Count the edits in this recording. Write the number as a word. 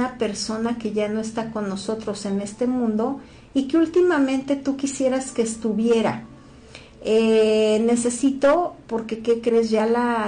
zero